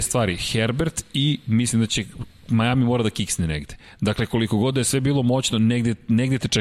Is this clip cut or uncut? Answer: uncut